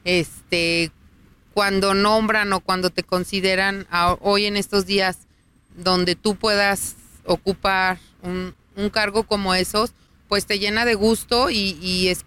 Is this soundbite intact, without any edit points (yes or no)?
yes